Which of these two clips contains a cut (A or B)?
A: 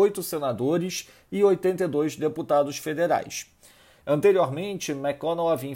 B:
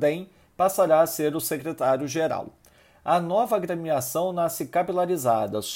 A